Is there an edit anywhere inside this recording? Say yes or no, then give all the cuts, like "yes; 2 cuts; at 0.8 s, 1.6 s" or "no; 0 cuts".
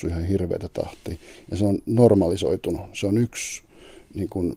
no; 0 cuts